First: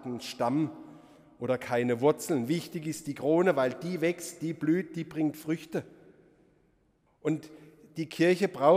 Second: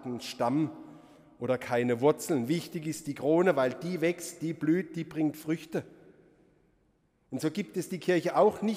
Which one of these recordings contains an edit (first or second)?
first